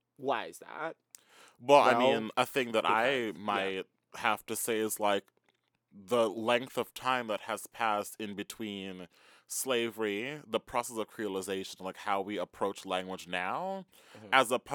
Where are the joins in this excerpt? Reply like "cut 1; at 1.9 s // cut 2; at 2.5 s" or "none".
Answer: none